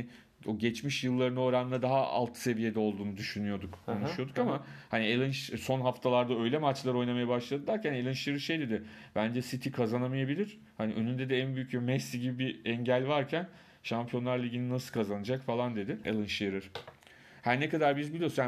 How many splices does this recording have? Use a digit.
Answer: 1